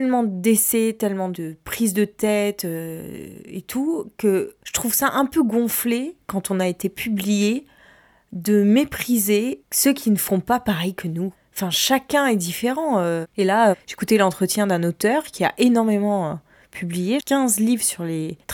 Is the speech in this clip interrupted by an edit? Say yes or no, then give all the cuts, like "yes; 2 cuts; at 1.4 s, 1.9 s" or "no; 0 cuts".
yes; 2 cuts; at 13.3 s, 17.2 s